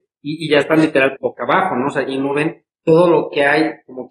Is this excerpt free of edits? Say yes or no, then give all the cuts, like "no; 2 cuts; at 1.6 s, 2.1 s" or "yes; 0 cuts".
no; 2 cuts; at 1.2 s, 2.7 s